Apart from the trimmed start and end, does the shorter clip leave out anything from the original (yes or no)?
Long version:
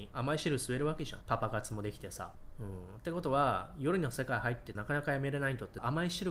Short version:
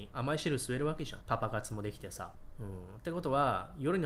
no